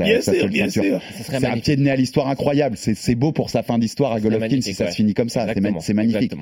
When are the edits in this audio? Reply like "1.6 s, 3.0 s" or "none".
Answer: none

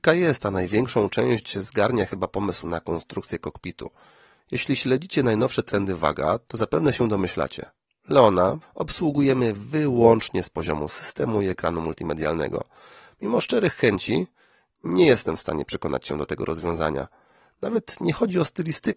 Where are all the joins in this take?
8.6 s

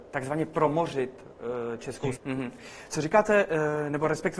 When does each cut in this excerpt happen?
2.1 s

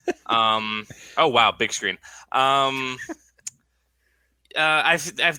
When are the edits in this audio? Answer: none

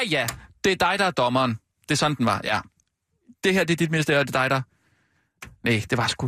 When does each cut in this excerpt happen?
none

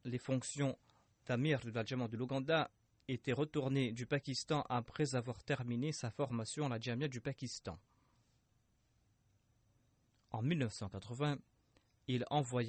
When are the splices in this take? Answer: none

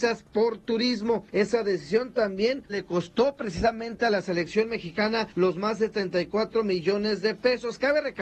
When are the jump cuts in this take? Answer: 2.7 s

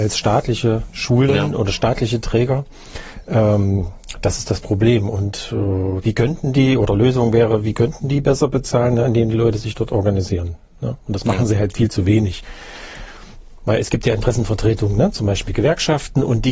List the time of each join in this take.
6.0 s

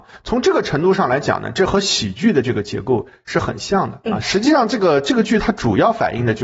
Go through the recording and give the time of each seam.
4.2 s

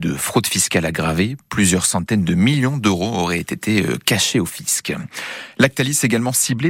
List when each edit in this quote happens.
none

